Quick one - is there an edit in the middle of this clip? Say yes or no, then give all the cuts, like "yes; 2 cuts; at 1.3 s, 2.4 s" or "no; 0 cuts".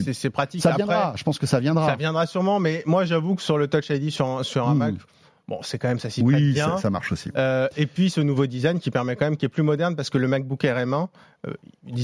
no; 0 cuts